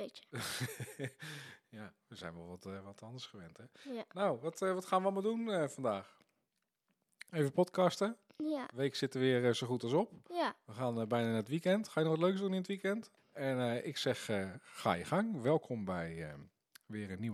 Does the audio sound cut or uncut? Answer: cut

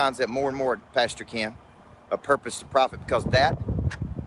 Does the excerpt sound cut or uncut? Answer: uncut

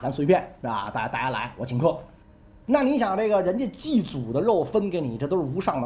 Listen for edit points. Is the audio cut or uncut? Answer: uncut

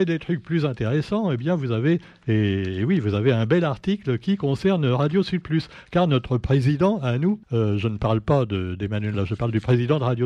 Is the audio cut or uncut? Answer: cut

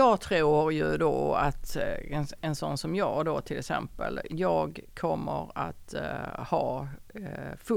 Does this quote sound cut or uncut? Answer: cut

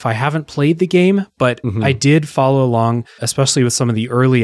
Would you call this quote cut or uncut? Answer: cut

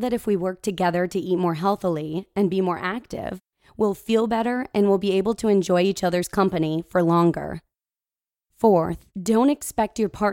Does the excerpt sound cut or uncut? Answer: cut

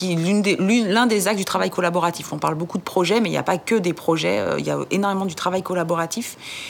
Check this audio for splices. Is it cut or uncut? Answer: uncut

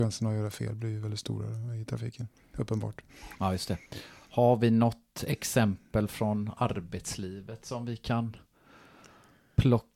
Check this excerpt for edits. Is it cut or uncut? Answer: uncut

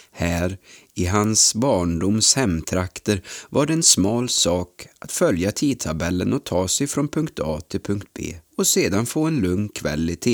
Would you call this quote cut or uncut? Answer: cut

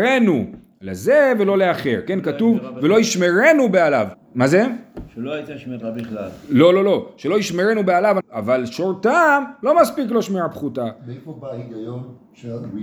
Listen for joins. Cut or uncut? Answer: cut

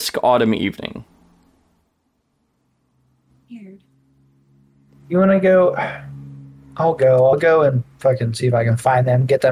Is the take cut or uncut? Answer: uncut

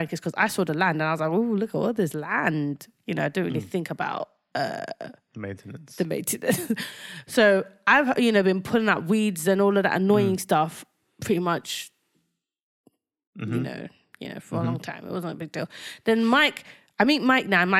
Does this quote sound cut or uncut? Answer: uncut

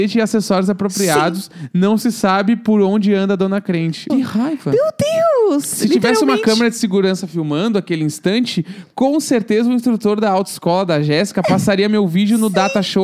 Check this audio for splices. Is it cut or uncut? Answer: cut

